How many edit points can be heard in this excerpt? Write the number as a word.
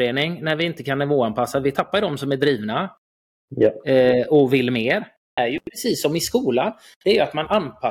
one